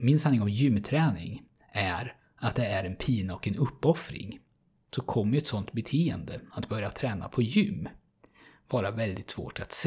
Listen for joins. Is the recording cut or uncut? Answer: uncut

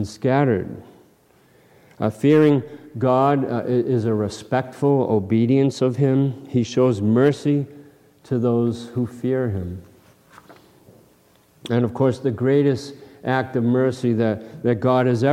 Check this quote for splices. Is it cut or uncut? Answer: uncut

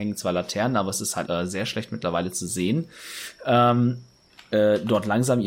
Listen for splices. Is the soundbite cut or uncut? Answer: cut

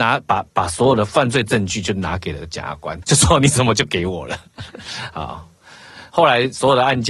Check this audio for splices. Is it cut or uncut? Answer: cut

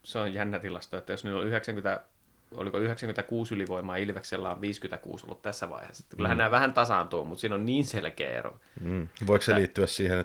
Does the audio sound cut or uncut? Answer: uncut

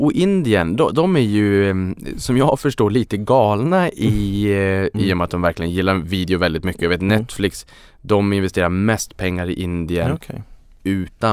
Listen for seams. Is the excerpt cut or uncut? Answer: cut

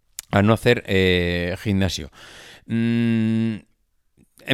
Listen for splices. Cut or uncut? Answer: uncut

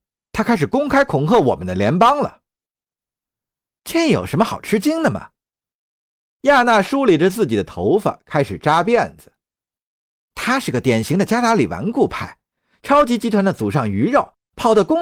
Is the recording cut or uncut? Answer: uncut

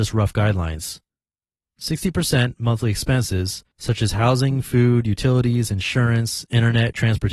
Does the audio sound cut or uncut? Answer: uncut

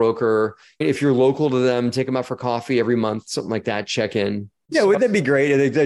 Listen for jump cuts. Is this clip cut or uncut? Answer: cut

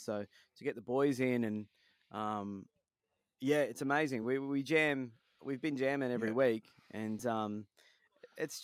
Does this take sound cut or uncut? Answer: uncut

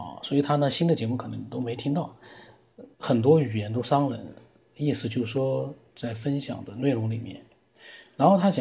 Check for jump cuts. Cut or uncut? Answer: cut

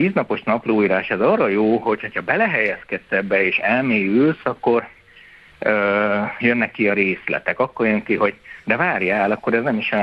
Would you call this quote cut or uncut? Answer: uncut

